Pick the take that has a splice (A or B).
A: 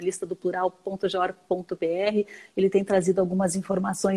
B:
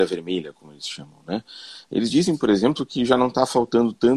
B